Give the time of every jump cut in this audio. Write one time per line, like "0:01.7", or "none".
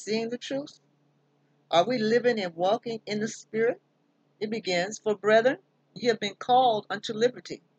0:04.2